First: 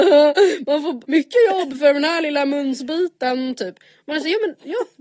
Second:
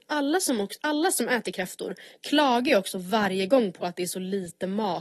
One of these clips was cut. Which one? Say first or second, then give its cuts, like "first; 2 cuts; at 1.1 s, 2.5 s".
first; 1 cut; at 1.0 s